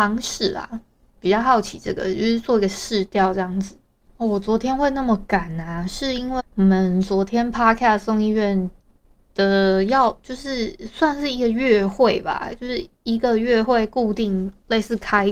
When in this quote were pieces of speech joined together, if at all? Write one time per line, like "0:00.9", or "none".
0:06.4